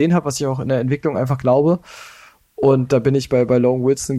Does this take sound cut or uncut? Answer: uncut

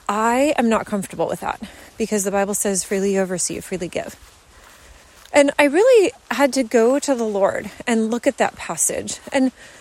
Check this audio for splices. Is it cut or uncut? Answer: uncut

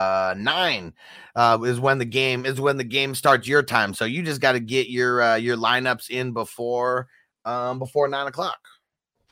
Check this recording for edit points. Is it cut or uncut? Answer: uncut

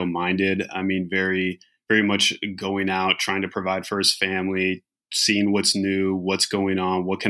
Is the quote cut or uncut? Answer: uncut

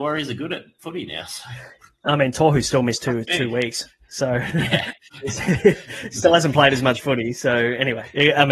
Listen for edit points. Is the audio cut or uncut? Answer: uncut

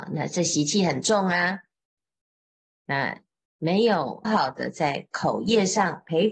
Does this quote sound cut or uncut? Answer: cut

